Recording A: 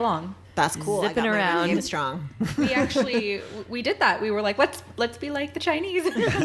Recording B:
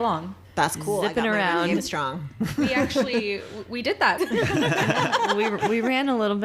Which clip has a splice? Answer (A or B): B